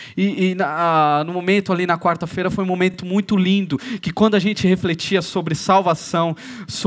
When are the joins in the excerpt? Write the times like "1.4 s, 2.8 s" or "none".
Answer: none